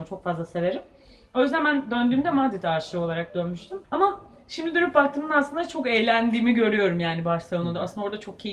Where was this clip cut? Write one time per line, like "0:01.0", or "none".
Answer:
0:03.8